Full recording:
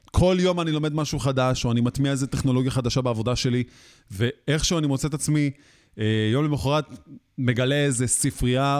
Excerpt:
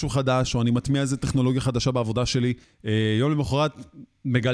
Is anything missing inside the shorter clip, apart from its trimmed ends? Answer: yes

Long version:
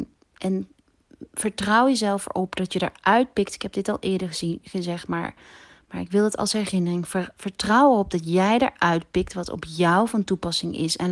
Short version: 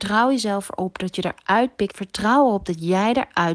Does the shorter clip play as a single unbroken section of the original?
no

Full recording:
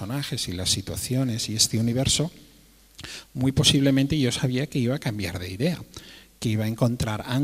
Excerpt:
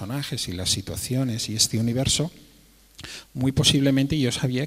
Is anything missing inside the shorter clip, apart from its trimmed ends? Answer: no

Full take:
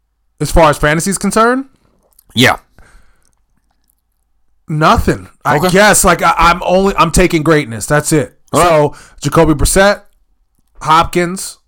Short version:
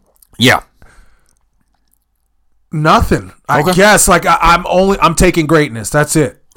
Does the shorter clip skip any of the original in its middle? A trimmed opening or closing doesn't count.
no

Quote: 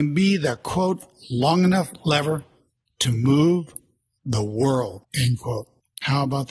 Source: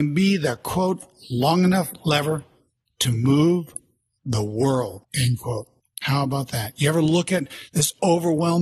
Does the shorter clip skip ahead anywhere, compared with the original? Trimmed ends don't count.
no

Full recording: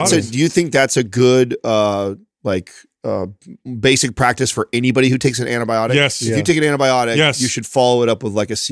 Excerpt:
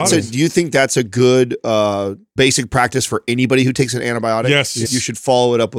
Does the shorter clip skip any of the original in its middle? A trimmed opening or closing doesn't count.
yes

